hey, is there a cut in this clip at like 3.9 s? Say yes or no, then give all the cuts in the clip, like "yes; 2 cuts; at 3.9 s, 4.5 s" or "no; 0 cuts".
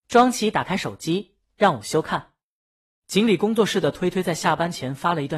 no; 0 cuts